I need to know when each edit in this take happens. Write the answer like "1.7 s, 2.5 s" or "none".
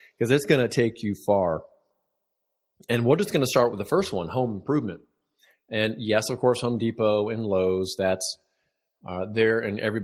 none